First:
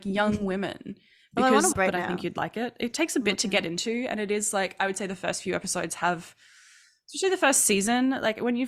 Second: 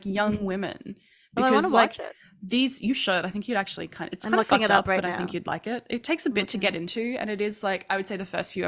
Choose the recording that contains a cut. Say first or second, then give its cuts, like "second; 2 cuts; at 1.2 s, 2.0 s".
first; 1 cut; at 1.7 s